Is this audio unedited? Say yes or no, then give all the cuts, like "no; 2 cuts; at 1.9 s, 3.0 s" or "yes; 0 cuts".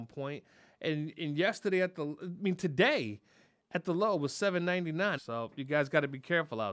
no; 2 cuts; at 1.1 s, 5.2 s